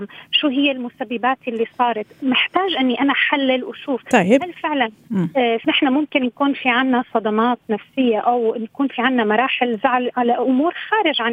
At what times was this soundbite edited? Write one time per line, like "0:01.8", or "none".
0:05.6

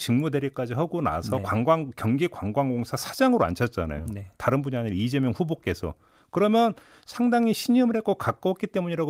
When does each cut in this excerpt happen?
none

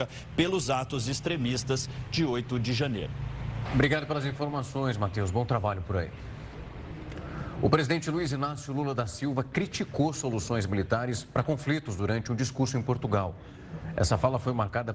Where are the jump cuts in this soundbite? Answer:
0:03.6

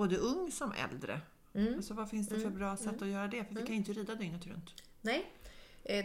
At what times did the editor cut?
none

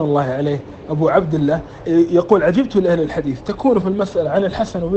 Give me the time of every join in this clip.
0:01.8

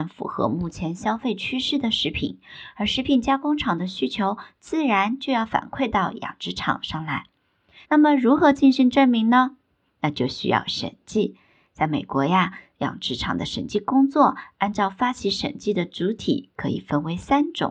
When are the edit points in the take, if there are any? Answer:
0:07.8

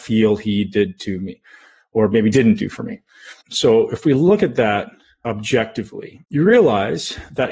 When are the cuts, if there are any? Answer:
0:03.4
0:06.2

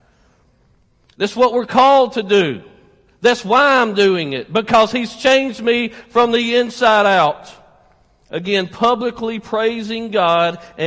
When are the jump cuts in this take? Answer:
none

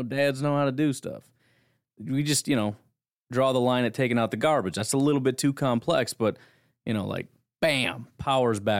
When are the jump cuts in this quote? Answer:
none

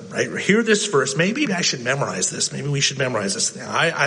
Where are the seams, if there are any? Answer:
0:01.5

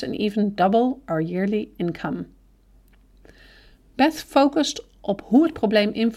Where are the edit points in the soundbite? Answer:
none

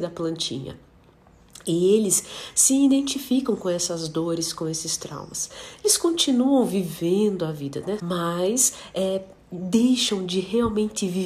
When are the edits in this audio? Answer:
0:08.0

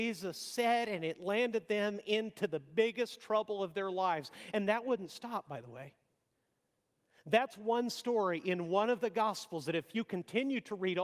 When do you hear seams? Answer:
none

